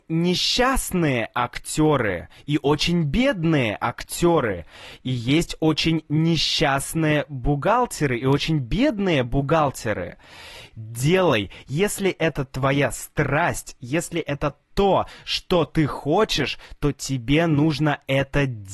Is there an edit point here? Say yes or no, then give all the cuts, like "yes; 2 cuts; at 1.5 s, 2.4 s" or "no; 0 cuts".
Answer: yes; 1 cut; at 10.7 s